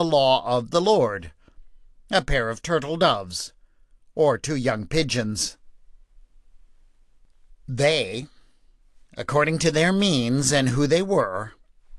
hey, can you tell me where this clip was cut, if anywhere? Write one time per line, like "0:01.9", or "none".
0:07.5